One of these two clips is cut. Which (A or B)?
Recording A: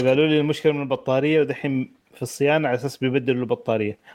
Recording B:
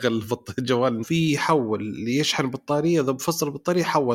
B